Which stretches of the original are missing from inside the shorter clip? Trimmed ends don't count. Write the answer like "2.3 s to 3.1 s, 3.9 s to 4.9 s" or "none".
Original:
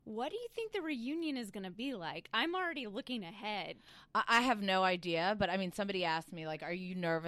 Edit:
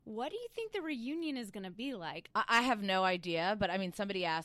2.3 s to 4.1 s